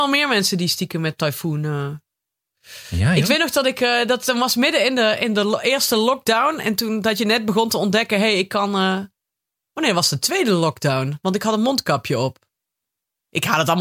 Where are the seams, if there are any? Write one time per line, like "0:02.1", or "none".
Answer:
none

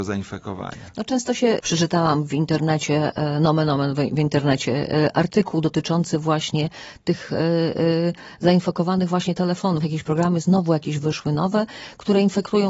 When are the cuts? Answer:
0:01.6

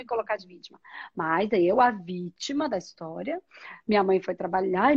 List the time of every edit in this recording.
none

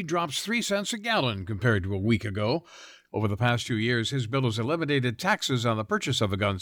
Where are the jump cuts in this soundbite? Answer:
0:03.1

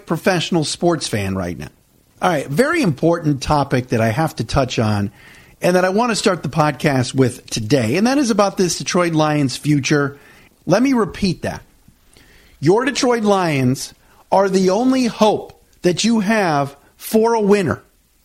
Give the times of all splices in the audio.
0:02.1
0:10.5

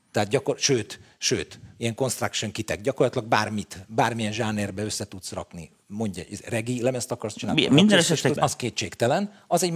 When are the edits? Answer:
0:08.4

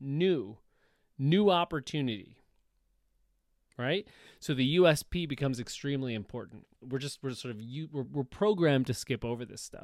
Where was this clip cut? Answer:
0:06.8
0:08.0

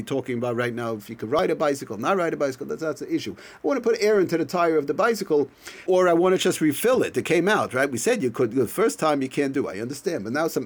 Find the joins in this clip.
0:05.9

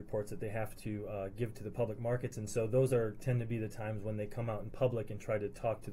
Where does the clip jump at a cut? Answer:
none

